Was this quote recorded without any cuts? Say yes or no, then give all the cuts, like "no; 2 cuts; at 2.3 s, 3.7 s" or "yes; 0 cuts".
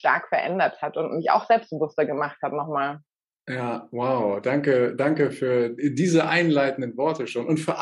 yes; 0 cuts